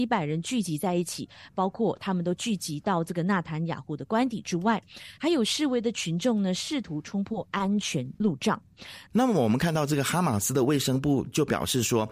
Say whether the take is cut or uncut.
cut